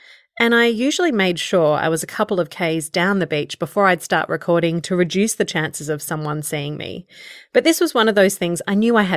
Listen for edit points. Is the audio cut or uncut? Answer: uncut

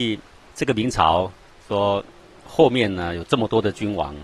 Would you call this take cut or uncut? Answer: uncut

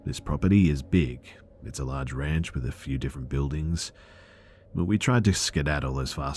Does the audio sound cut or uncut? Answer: uncut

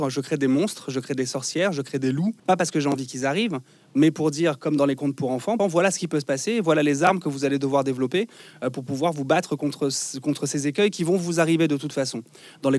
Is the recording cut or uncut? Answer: cut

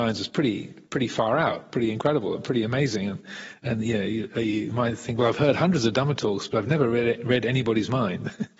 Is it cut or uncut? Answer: uncut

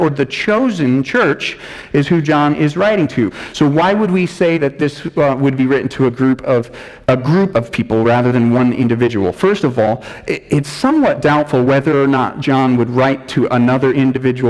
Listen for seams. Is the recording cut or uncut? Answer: cut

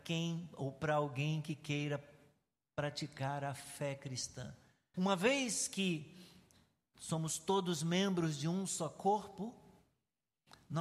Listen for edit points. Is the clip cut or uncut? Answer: cut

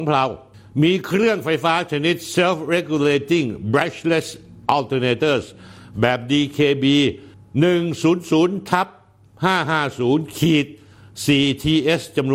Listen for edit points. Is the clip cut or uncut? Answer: uncut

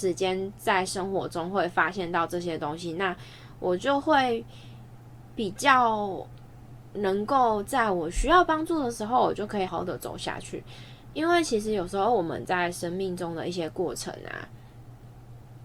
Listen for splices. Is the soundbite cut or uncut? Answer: cut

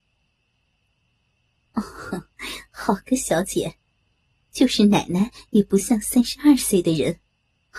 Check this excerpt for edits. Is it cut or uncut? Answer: cut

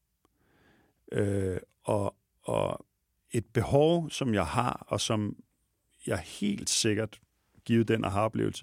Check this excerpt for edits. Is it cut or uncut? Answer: uncut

